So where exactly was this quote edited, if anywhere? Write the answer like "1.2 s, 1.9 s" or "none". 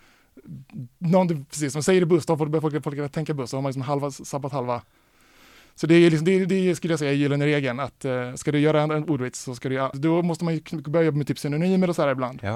9.9 s